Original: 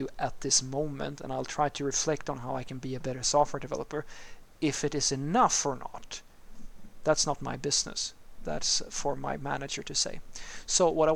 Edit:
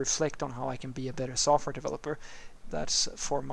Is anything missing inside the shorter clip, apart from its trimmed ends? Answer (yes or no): yes